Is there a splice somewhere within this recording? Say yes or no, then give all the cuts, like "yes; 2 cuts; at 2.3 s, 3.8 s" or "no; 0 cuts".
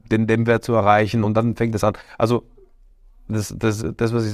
no; 0 cuts